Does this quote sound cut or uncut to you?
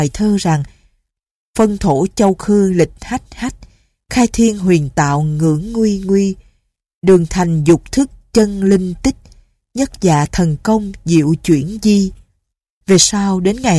cut